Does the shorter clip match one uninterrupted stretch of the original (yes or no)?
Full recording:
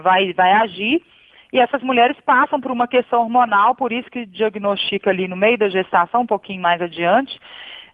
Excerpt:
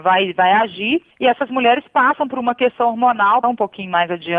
no